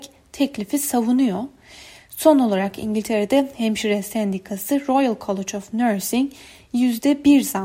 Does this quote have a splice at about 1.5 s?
no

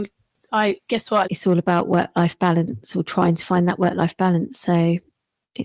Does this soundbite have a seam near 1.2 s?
yes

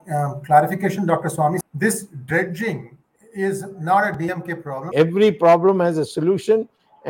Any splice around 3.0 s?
no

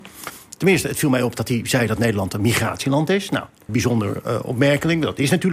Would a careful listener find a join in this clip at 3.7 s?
yes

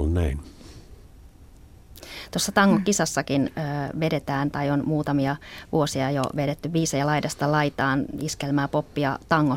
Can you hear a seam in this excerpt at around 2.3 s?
no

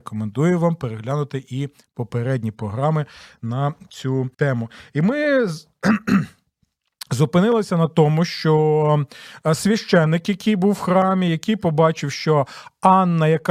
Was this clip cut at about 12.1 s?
no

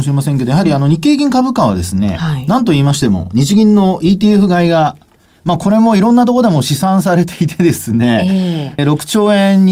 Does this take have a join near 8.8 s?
yes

